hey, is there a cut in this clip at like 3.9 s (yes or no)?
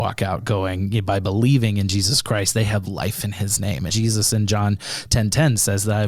yes